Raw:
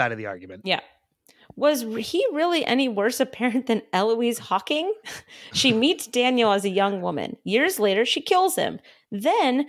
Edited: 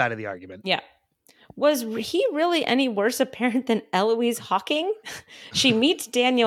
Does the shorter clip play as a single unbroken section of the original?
yes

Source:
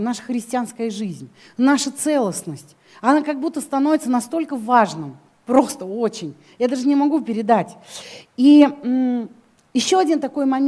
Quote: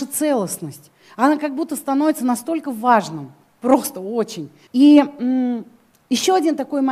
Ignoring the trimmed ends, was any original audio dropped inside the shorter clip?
yes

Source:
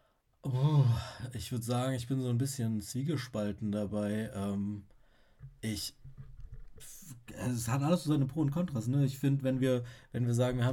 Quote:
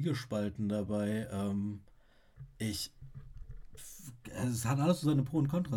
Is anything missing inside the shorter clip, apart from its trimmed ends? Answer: no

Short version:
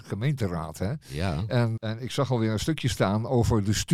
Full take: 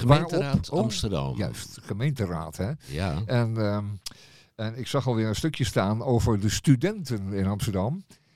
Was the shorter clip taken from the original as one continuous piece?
no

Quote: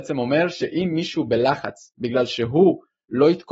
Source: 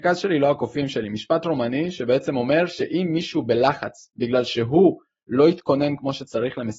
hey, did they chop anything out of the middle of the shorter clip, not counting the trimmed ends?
no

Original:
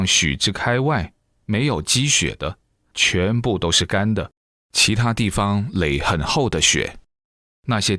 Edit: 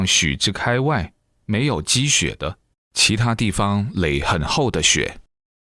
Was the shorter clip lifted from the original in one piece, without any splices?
no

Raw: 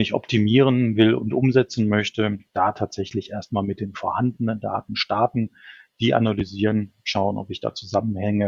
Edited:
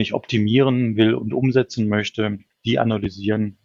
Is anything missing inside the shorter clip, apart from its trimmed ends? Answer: yes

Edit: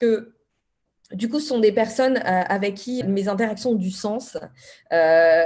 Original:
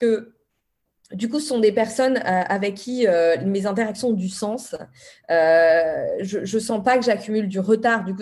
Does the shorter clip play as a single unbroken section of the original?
no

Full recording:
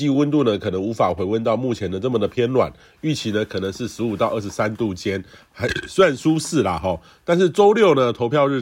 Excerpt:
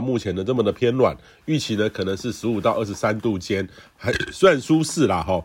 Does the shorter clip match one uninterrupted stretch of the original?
yes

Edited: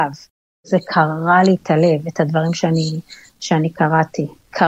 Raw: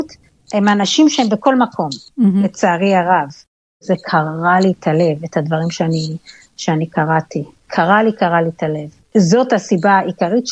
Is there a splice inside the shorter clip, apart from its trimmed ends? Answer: no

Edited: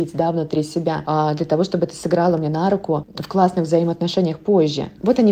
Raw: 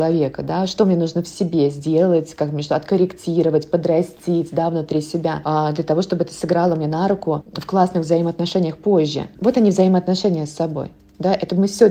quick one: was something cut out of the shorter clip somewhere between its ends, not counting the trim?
no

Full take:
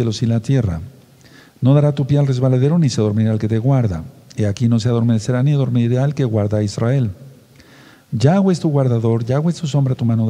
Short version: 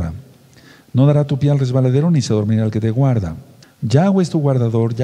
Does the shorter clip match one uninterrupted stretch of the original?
no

